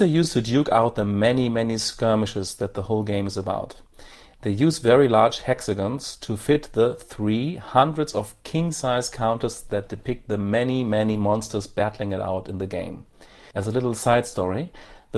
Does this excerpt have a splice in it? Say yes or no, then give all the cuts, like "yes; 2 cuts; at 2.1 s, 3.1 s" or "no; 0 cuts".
no; 0 cuts